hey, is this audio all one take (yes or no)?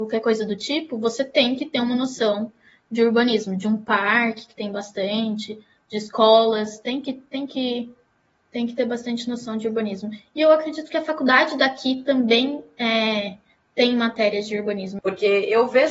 no